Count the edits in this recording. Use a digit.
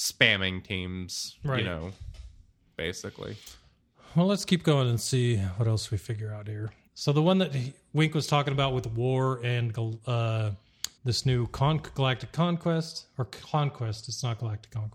2